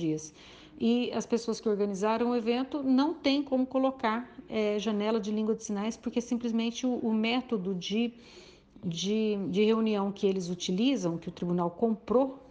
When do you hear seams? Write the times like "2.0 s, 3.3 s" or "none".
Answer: none